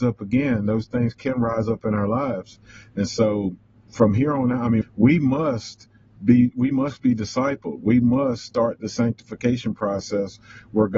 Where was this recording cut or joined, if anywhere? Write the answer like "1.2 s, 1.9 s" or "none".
4.8 s